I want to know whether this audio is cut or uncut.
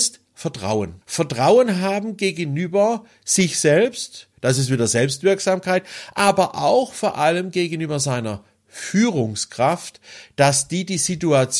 cut